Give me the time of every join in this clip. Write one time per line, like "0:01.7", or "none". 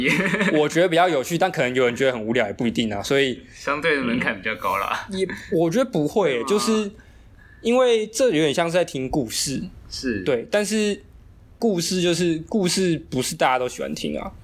none